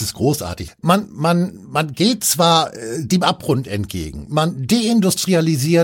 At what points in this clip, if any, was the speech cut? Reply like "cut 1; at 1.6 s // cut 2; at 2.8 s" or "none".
none